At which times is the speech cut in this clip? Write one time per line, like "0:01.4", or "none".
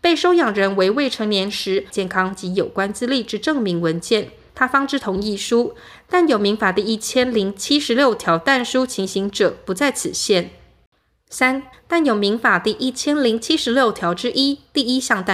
0:01.9
0:04.5
0:11.7